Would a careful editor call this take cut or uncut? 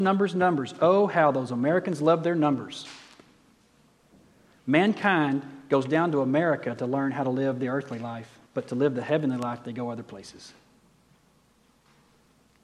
cut